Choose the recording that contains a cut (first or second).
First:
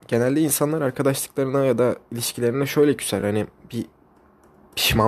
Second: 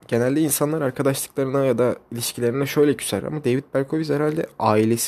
second